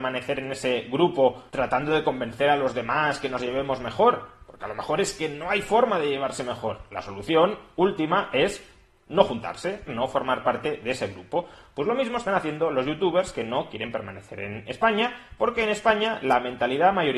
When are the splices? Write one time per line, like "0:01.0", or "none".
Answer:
0:09.9